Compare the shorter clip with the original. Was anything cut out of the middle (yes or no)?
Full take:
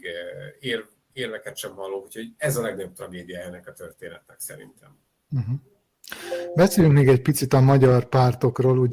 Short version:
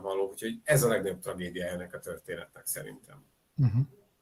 no